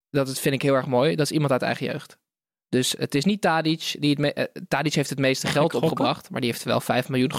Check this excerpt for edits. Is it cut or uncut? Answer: uncut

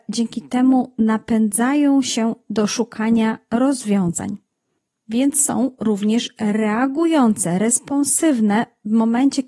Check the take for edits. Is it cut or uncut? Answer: uncut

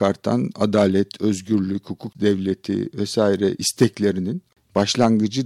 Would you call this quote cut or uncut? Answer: uncut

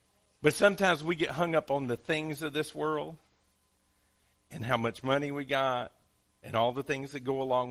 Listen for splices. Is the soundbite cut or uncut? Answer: uncut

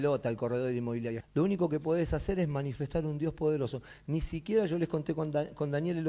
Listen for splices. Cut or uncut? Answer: cut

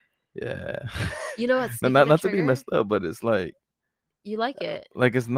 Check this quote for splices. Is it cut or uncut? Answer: uncut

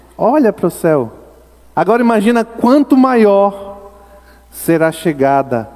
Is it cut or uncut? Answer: cut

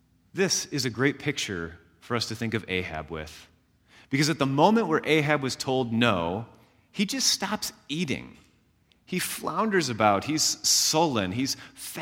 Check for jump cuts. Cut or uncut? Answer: uncut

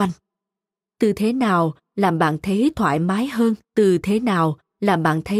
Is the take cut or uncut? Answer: cut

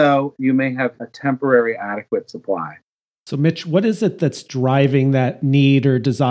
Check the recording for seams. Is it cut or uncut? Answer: uncut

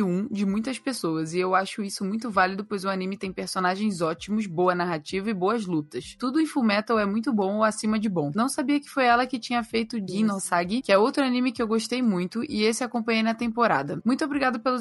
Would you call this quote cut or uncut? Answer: uncut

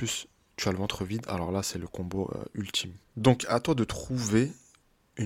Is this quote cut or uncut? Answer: cut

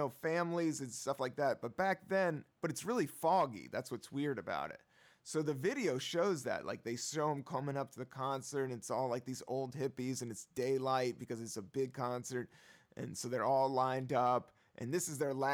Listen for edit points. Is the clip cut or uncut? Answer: uncut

